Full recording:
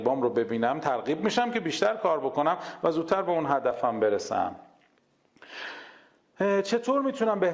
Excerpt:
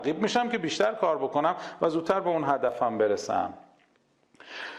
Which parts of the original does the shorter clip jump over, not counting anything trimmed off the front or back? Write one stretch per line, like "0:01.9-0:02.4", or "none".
none

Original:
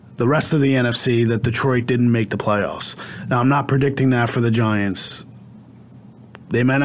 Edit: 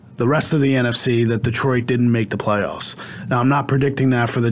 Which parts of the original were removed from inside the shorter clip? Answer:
none

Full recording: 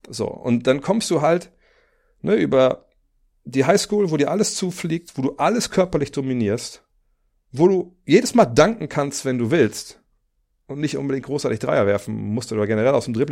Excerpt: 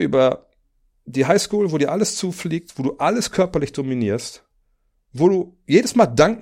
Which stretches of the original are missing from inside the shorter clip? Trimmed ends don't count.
none

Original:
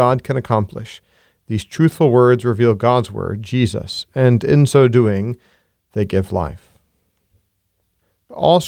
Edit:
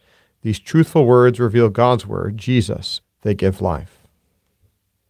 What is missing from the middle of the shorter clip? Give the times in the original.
0:04.1-0:05.7

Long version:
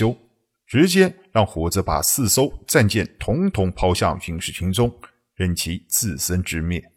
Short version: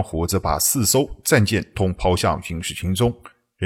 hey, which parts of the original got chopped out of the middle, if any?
0:03.2-0:03.5

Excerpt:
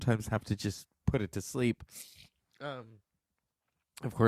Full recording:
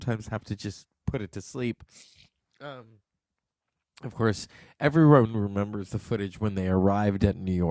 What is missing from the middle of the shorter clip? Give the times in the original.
none

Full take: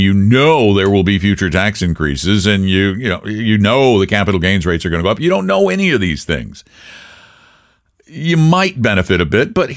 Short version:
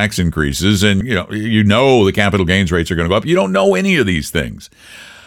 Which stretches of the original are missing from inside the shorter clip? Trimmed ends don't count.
0:02.6-0:02.9

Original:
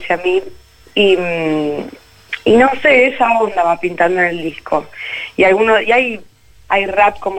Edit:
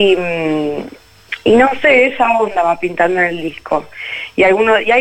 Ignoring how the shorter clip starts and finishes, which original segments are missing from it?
none

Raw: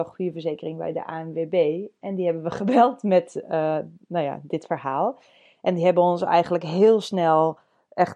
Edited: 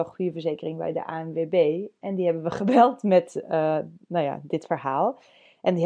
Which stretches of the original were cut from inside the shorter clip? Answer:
none

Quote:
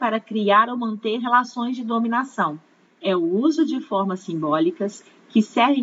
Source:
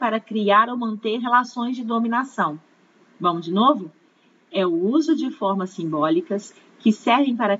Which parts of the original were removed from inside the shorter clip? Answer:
0:02.9-0:04.4

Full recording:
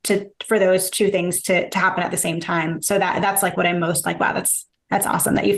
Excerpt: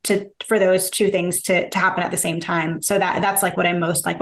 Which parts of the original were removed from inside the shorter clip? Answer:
none

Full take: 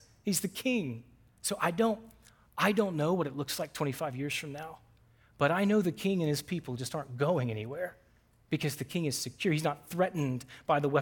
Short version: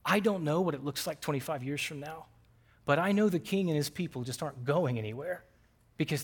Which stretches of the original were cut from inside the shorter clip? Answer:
none

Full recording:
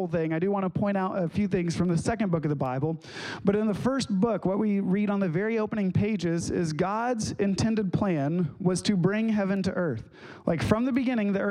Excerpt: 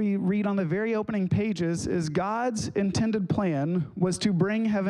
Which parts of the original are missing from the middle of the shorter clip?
none

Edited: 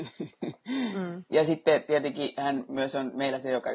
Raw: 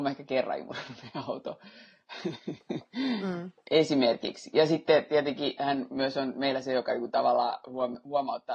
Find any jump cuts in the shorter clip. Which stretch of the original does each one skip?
0:03.6-0:04.5

